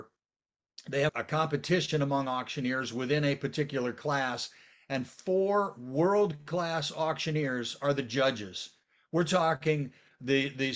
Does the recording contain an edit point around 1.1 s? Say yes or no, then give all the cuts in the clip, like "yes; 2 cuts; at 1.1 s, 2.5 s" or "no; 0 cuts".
yes; 1 cut; at 1.1 s